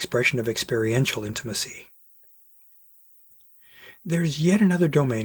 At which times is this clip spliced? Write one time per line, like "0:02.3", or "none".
none